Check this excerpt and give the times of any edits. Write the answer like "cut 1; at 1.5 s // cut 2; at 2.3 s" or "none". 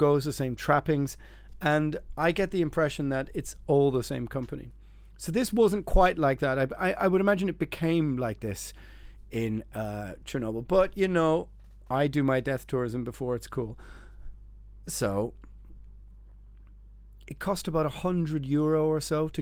none